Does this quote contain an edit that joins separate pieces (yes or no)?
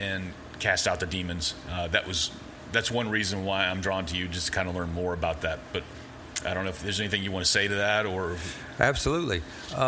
no